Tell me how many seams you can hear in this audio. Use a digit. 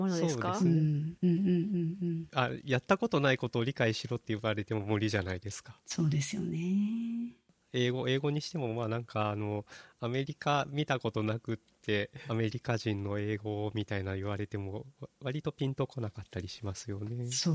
2